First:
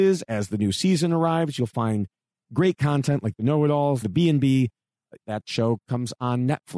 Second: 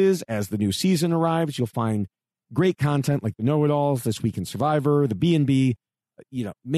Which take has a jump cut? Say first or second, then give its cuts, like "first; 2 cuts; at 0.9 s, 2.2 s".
first; 2 cuts; at 4.0 s, 5.2 s